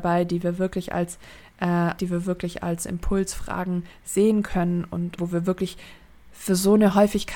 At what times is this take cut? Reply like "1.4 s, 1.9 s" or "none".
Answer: 2.0 s, 5.2 s